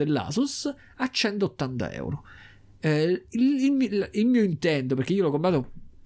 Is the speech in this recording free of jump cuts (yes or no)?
yes